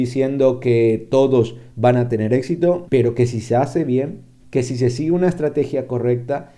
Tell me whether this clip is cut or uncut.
cut